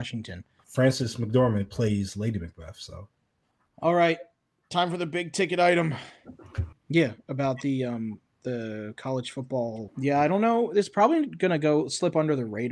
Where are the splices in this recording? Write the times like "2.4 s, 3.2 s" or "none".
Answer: 6.7 s, 9.9 s